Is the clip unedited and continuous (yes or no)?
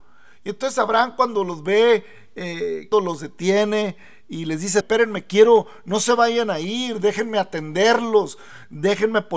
no